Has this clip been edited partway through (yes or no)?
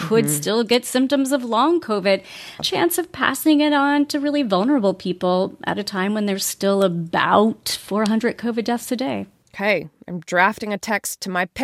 yes